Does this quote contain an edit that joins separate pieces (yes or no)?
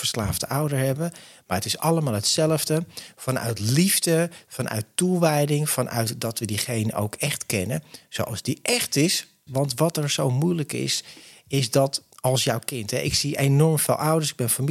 yes